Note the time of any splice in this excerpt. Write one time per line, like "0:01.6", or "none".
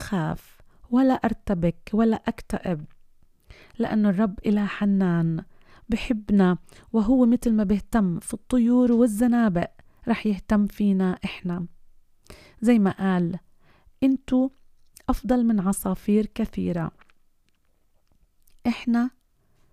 none